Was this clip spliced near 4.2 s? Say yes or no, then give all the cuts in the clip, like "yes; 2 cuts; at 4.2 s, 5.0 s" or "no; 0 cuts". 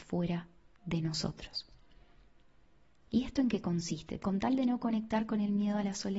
yes; 1 cut; at 4.2 s